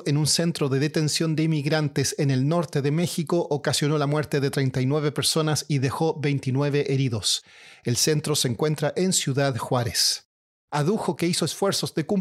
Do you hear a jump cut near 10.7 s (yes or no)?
yes